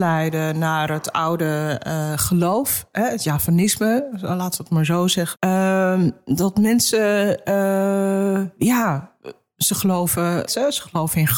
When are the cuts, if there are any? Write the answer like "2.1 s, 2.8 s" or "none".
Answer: 5.3 s, 10.5 s